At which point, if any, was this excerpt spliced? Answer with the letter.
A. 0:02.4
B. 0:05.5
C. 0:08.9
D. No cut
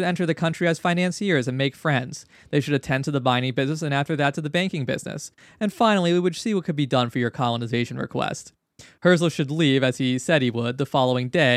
D